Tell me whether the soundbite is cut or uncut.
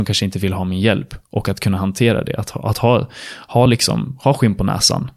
uncut